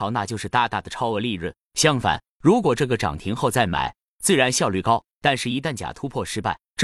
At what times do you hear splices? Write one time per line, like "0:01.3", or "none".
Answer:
0:04.1